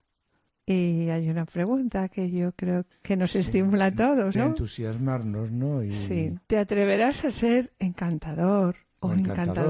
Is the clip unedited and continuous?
no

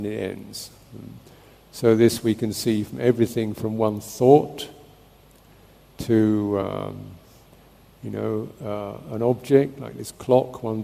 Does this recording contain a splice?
no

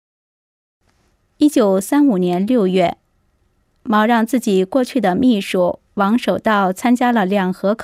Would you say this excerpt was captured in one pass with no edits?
yes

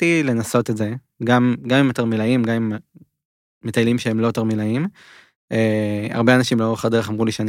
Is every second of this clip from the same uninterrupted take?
yes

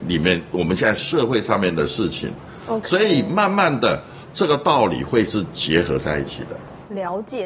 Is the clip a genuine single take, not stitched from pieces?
yes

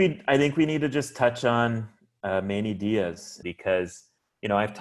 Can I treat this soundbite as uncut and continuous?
no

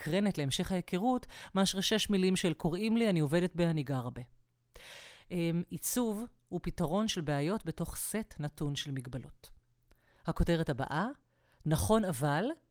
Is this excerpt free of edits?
yes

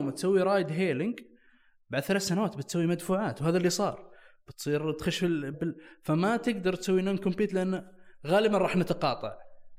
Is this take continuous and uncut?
no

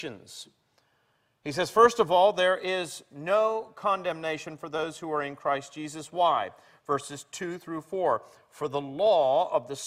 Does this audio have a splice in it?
no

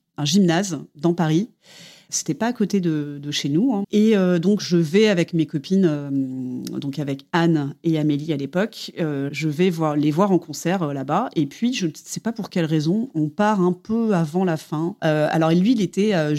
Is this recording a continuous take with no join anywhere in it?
no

